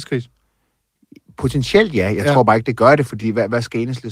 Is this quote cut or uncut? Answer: uncut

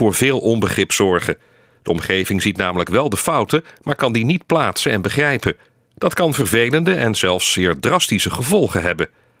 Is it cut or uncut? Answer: uncut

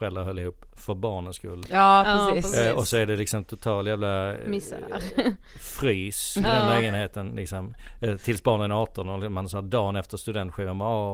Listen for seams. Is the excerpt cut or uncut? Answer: uncut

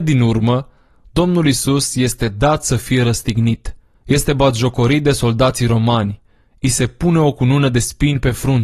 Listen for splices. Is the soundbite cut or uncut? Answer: uncut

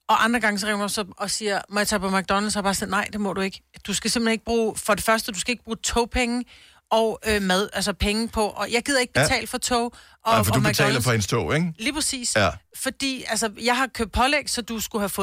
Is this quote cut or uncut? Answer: uncut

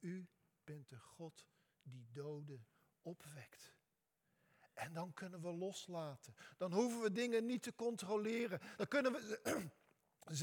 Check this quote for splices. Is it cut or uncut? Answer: uncut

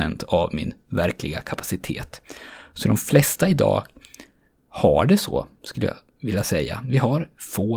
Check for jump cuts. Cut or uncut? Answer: uncut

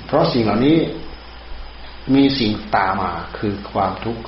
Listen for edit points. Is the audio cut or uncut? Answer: cut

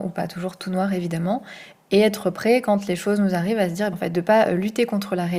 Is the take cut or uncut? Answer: cut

